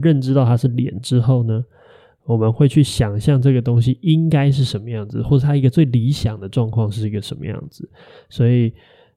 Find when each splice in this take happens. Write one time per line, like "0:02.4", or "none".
none